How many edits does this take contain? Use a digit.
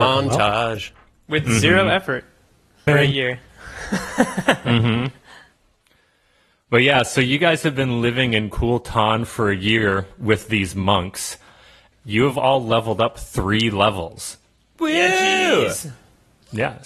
2